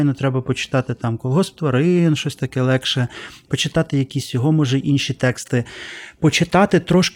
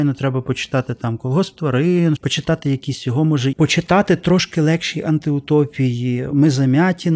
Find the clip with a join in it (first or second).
second